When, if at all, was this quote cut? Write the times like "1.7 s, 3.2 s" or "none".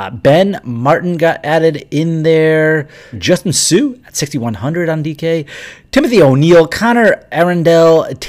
3.1 s